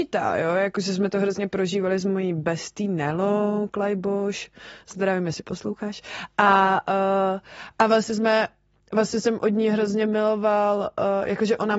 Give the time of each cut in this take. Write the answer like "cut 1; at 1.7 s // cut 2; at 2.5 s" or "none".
none